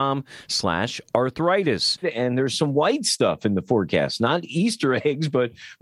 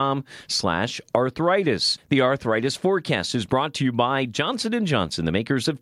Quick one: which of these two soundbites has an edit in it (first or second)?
first